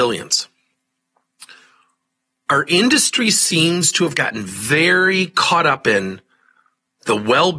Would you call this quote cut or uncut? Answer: uncut